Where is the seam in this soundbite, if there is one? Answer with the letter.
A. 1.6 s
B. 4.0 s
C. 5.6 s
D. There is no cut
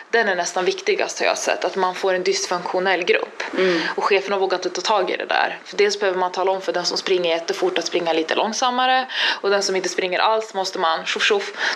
D